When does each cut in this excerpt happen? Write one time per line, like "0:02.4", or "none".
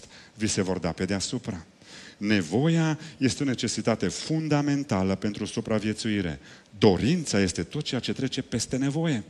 0:06.7